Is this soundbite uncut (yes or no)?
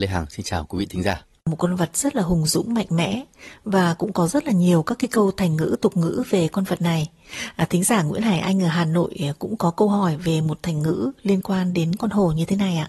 no